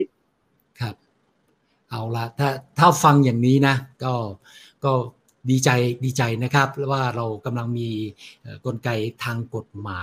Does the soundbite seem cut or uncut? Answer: uncut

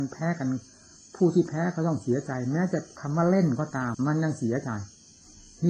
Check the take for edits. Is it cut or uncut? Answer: cut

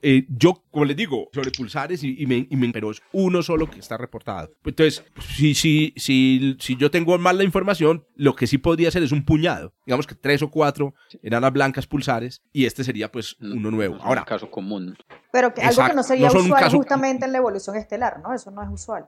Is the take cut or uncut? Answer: cut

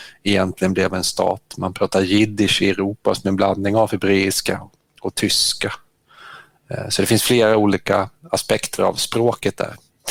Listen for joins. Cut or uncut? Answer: uncut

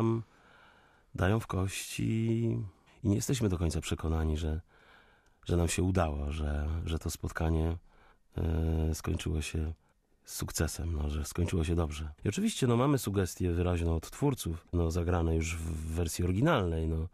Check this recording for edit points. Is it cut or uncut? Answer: cut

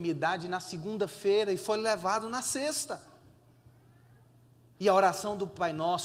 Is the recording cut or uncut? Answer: cut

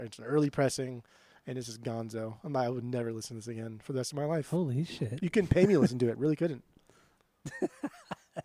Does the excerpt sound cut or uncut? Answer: uncut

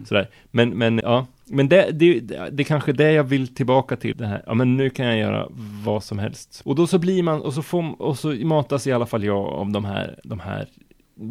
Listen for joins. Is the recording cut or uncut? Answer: cut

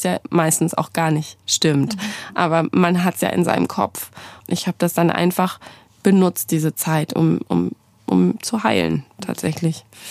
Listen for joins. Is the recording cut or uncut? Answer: cut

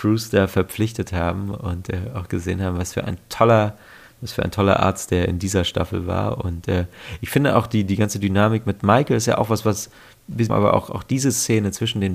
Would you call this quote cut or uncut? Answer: cut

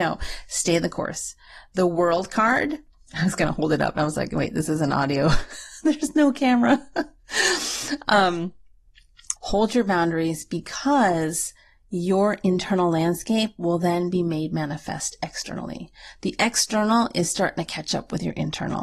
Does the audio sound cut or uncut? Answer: cut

